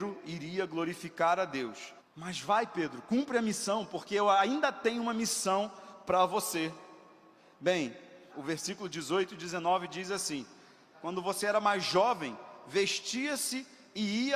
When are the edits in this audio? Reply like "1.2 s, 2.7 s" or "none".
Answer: 2.0 s, 8.3 s, 10.9 s